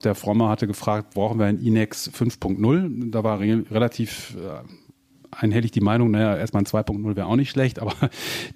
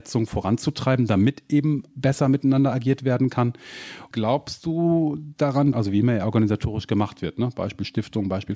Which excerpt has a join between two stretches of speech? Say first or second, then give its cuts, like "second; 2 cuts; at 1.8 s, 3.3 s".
second; 3 cuts; at 1.9 s, 4.1 s, 5.7 s